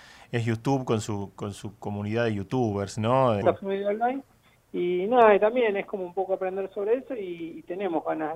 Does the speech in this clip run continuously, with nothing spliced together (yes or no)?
no